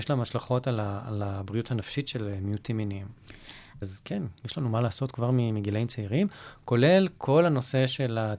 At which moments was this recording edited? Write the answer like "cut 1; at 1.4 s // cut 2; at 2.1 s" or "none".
cut 1; at 3.8 s